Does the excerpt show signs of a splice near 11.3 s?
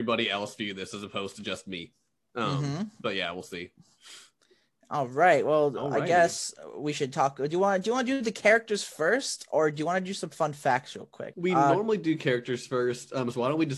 yes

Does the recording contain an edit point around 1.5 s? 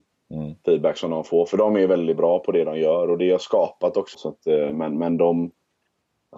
no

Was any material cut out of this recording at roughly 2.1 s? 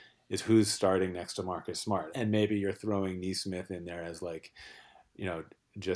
yes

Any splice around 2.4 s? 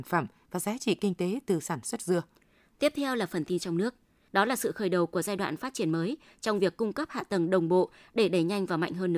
no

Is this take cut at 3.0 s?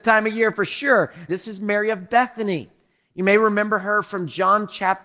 no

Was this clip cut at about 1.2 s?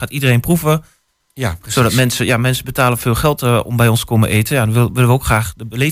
yes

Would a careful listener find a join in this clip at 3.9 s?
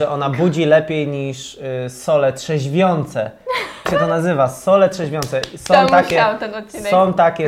yes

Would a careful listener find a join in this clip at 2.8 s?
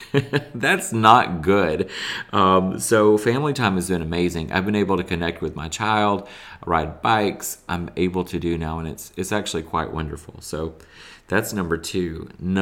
no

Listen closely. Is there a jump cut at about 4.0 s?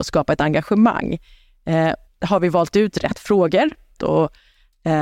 yes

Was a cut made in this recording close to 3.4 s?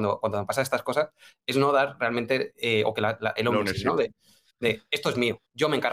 yes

